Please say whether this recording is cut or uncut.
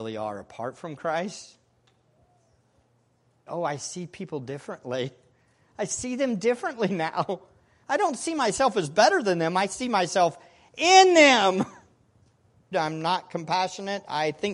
cut